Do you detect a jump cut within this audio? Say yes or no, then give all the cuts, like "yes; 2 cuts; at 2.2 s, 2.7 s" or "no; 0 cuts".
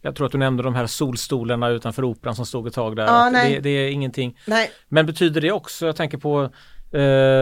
no; 0 cuts